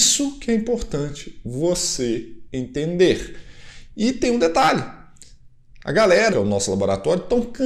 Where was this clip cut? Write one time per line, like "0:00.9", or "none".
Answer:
0:06.3